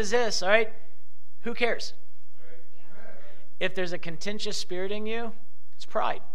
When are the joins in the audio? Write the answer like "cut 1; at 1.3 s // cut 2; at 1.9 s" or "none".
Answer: none